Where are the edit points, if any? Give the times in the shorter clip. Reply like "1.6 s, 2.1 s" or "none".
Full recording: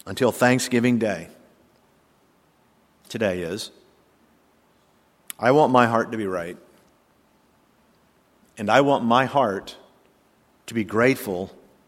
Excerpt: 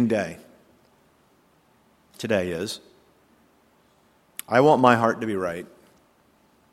none